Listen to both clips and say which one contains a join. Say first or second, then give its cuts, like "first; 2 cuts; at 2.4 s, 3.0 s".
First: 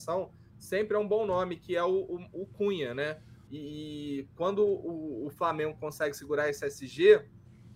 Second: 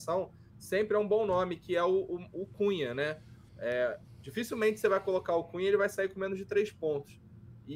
first; 1 cut; at 3.5 s